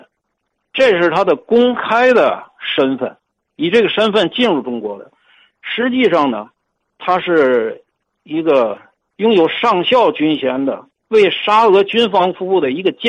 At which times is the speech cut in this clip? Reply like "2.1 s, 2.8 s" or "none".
none